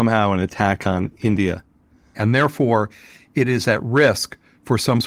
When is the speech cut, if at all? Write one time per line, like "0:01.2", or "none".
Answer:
0:02.1